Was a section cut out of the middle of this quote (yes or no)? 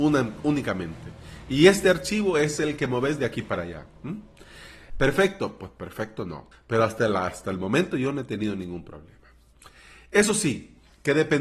yes